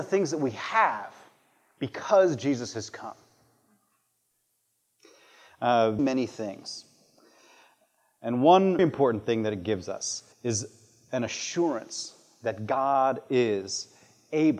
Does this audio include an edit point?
yes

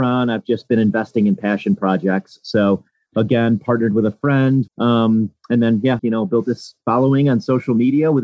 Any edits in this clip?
yes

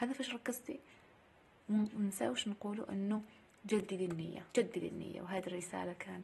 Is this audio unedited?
no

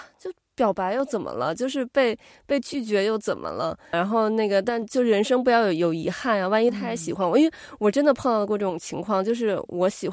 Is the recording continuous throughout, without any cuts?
no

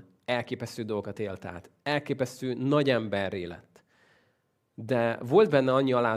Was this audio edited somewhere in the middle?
no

